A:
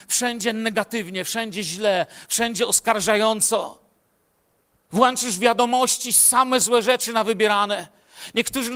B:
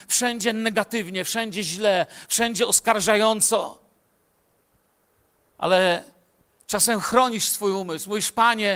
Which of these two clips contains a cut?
A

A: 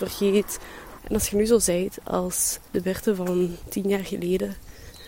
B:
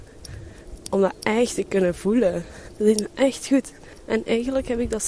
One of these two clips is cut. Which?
A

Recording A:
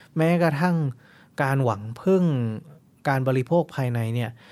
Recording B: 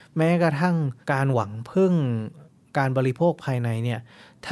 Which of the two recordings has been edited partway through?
B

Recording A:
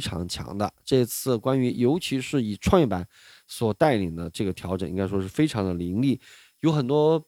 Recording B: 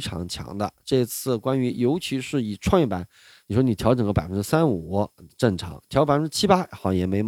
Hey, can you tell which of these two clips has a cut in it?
B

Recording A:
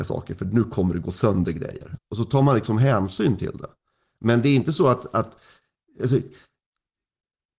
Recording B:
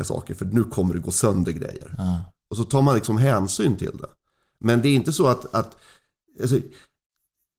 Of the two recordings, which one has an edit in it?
A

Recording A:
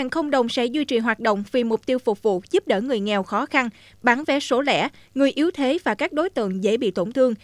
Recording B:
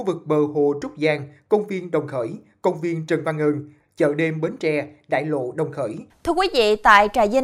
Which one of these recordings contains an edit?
B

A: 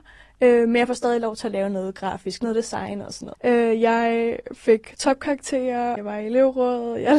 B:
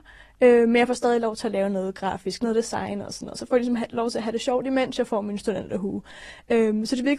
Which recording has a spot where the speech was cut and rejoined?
A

